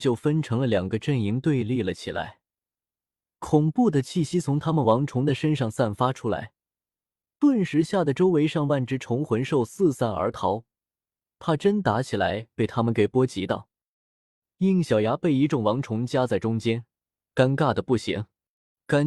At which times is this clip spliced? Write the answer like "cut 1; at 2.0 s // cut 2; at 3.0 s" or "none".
none